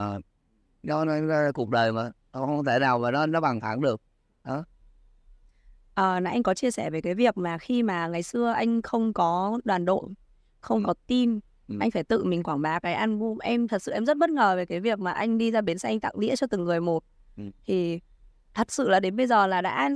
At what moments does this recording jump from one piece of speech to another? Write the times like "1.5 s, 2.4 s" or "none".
none

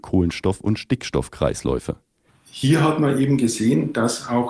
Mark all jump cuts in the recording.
2.3 s

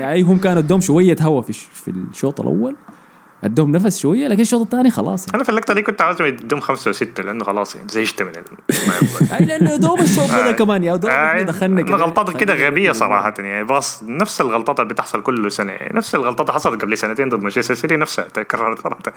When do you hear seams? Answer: none

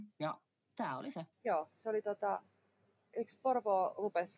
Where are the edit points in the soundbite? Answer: 1.3 s

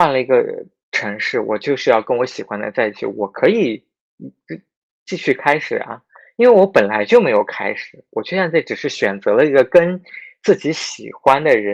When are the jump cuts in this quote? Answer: none

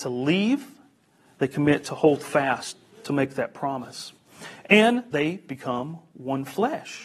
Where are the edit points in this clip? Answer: none

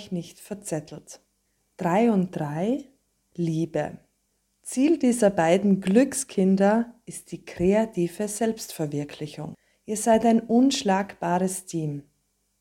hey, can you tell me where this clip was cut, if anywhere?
none

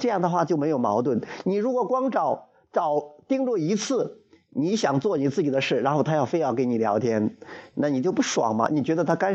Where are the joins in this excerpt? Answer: none

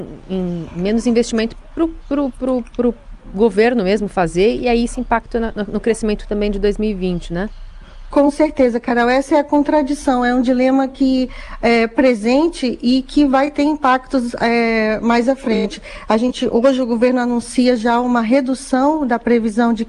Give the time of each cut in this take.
none

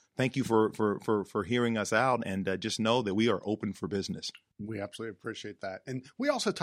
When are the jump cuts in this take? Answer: none

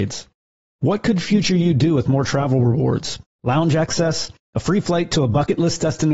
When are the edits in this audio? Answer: 3.3 s

